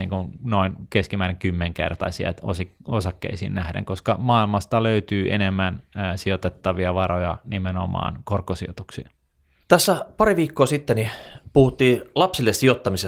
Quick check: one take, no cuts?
yes; 0 cuts

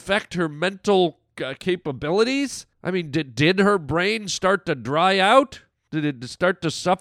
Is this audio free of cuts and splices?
no; 1 cut; at 2.7 s

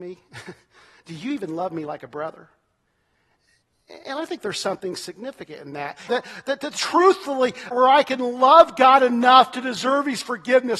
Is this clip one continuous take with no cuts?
no; 2 cuts; at 6.1 s, 7.7 s

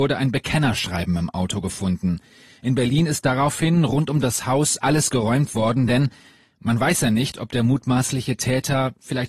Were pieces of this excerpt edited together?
no; 0 cuts

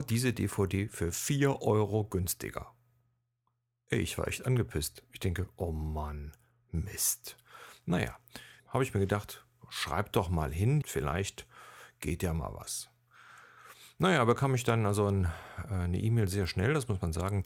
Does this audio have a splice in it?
yes; 2 cuts; at 8.6 s, 10.8 s

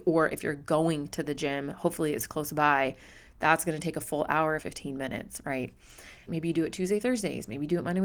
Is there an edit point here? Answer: yes; 2 cuts; at 4.6 s, 6.3 s

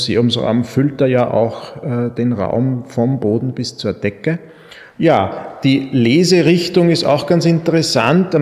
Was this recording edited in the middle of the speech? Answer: yes; 1 cut; at 4.9 s

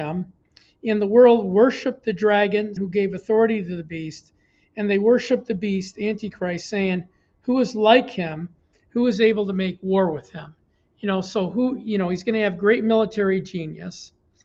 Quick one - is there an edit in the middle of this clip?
yes; 1 cut; at 2.8 s

